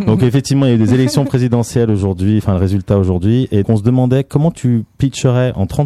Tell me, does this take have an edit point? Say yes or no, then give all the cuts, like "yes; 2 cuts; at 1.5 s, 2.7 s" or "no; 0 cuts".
yes; 1 cut; at 3.6 s